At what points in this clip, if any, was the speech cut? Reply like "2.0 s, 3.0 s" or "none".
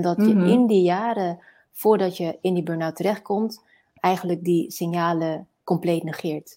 4.0 s